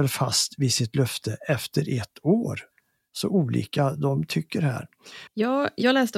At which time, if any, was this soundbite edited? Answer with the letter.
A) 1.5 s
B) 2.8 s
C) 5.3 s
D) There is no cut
C